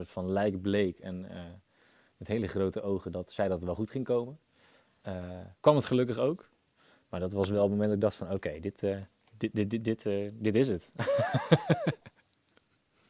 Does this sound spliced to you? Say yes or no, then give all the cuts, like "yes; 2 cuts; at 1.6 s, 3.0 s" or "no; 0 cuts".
no; 0 cuts